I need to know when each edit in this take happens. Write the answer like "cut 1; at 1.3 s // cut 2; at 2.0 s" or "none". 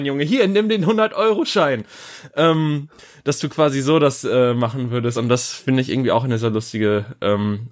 none